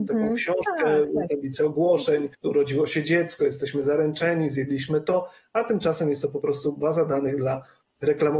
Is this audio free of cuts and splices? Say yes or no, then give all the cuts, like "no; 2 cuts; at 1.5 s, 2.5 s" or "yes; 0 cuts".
yes; 0 cuts